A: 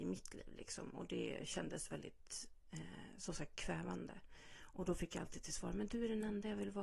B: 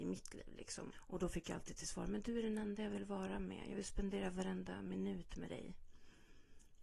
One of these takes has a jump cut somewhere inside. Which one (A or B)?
B